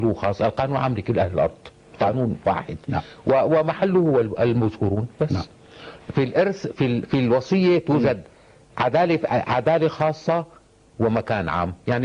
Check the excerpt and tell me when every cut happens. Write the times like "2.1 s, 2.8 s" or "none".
6.0 s